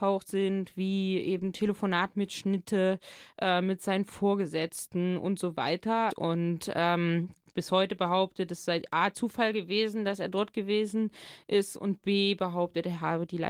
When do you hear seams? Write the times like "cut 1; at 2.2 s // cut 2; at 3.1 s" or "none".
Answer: cut 1; at 6.1 s

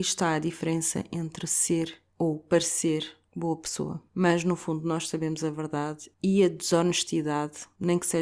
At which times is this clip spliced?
cut 1; at 4.1 s

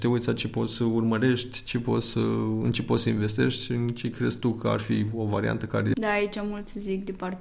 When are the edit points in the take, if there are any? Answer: cut 1; at 5.9 s

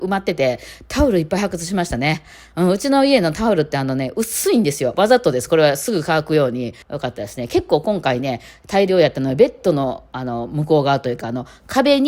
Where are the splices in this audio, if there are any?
cut 1; at 6.8 s

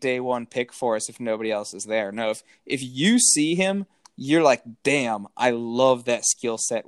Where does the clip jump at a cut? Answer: none

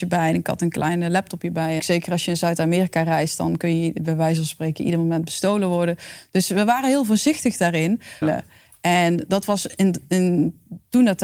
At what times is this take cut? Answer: cut 1; at 1.8 s // cut 2; at 8.2 s

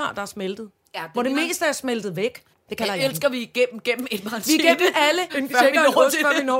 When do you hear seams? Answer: cut 1; at 2.5 s // cut 2; at 5.3 s

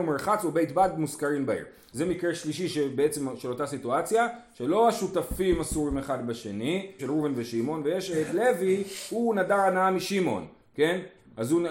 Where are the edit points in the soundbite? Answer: cut 1; at 1.9 s // cut 2; at 7.0 s

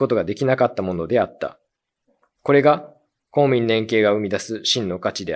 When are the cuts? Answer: cut 1; at 2.3 s

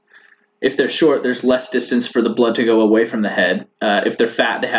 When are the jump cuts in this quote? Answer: cut 1; at 3.7 s

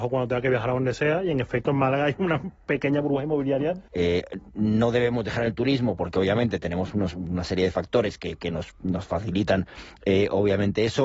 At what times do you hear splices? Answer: cut 1; at 3.9 s

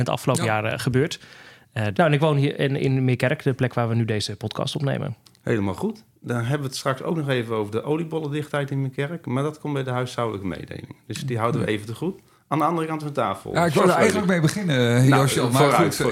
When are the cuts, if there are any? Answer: cut 1; at 1.9 s

